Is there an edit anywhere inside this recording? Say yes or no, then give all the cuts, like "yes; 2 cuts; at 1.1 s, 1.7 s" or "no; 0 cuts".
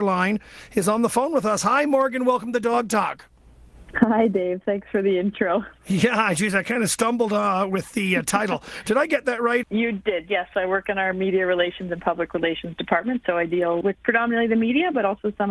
yes; 2 cuts; at 9.6 s, 13.8 s